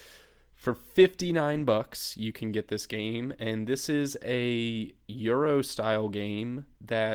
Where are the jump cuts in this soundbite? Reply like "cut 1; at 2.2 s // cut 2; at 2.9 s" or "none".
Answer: none